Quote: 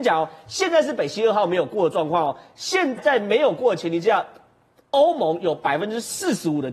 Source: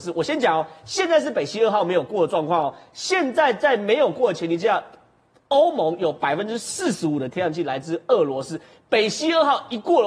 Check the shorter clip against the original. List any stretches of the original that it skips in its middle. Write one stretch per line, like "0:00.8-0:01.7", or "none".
0:03.3-0:03.5